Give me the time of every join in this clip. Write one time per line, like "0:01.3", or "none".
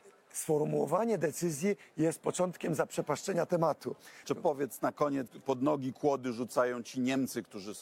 0:04.2
0:05.3